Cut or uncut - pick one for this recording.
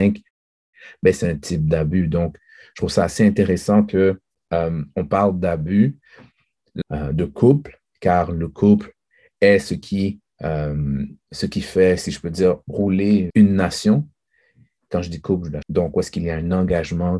cut